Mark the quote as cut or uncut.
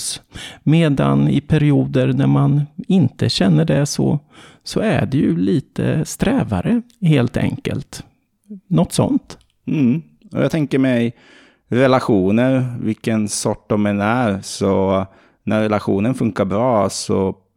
uncut